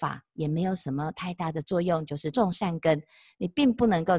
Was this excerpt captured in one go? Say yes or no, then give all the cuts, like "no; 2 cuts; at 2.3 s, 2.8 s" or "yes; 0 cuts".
no; 1 cut; at 2.3 s